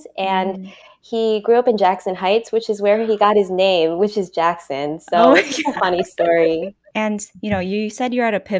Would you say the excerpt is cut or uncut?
uncut